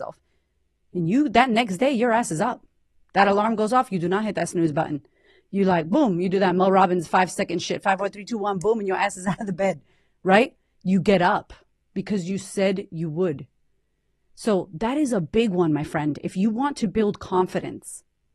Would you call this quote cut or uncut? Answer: uncut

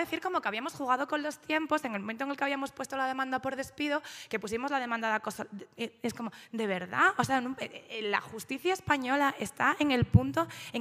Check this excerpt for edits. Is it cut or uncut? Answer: uncut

